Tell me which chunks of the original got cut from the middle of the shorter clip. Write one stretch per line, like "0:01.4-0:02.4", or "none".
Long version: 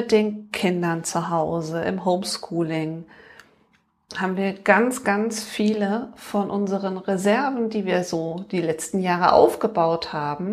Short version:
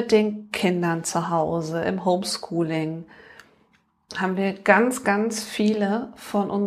none